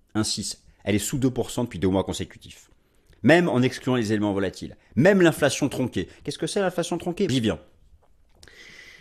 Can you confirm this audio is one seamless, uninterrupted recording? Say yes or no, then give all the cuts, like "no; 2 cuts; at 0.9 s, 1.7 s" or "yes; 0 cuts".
no; 1 cut; at 7.3 s